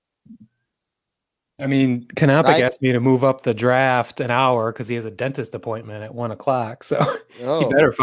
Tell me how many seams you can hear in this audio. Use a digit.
0